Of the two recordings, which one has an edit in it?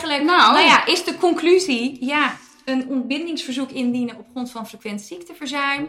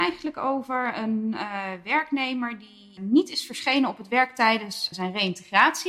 second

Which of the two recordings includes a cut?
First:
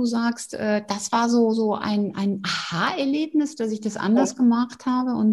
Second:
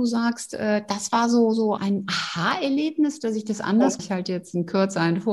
second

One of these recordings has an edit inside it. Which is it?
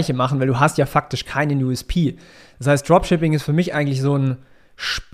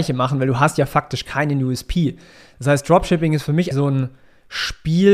second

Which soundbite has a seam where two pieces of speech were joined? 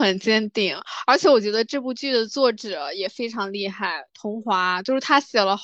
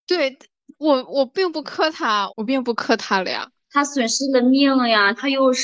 second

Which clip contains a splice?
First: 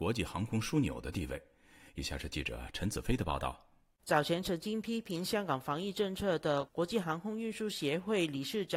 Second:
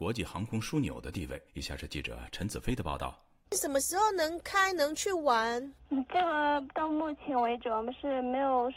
second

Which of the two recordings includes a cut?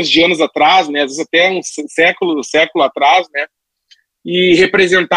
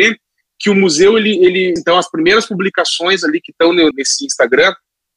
second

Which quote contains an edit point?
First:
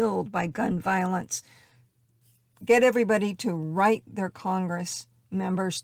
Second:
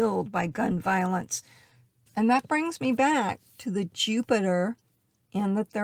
second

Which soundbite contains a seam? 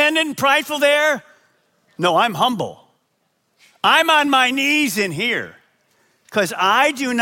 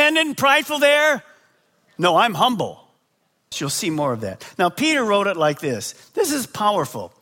second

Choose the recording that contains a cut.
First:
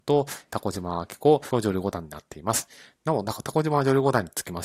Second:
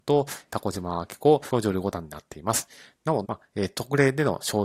second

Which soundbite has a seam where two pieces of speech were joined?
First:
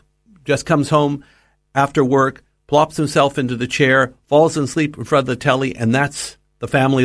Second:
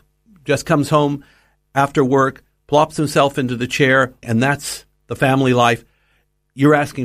second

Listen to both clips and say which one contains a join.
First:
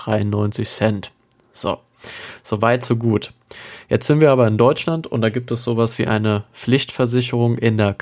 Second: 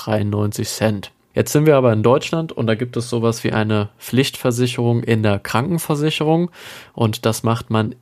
second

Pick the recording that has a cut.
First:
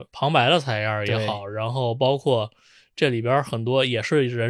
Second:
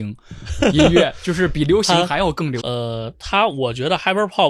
second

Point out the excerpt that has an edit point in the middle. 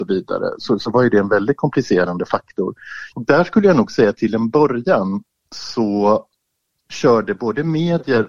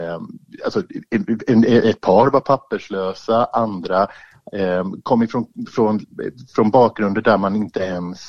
first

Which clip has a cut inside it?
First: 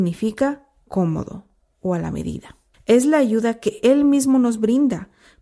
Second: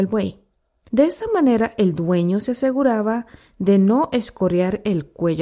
first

